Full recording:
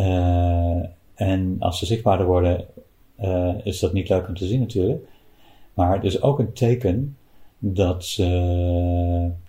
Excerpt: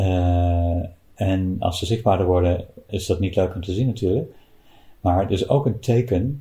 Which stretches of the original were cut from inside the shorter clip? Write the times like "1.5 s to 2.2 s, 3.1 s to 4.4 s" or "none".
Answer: 2.9 s to 3.6 s

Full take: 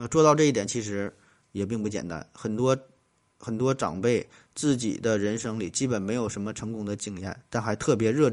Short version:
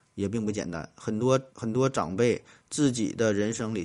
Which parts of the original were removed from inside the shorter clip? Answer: 2.9 s to 3.4 s

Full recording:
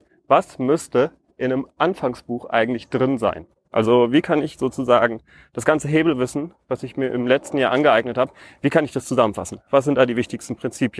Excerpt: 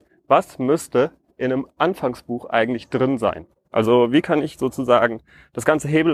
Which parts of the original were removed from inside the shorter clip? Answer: none

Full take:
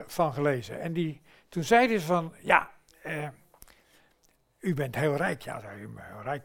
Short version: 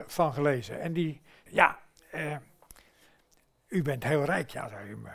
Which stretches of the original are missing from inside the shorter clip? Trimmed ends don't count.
1.5 s to 2.4 s

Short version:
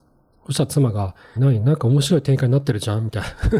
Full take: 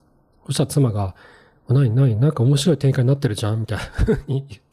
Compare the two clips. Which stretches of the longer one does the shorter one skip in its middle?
1.4 s to 1.9 s

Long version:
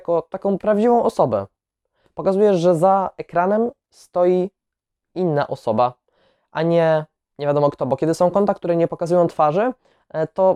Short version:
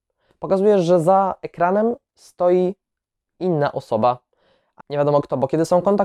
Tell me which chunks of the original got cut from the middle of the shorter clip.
6.5 s to 7.3 s

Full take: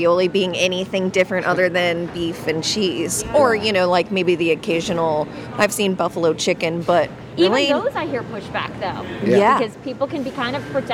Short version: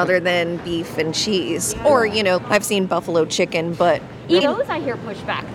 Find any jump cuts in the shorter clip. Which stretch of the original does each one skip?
3.9 s to 5.5 s, 7.5 s to 7.7 s

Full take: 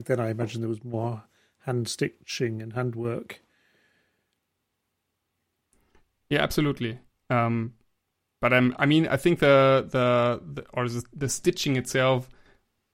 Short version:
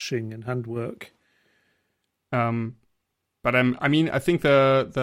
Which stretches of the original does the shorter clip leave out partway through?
4.6 s to 7.3 s

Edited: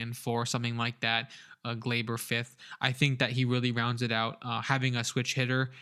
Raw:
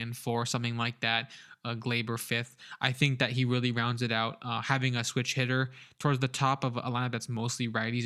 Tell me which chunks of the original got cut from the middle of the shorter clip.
none

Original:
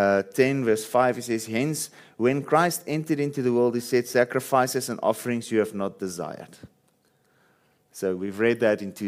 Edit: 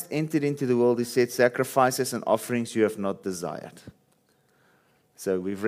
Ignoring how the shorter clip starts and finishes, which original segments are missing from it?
none

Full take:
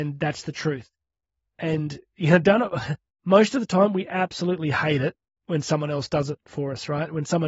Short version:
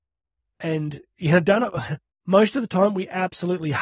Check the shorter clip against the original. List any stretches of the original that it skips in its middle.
none

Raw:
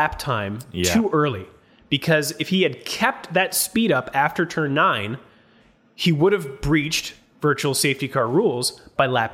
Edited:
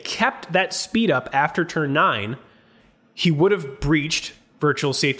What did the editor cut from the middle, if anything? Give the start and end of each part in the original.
none

